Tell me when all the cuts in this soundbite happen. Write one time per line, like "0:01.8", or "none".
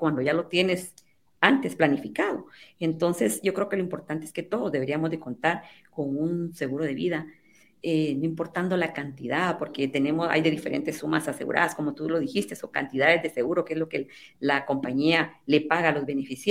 0:01.4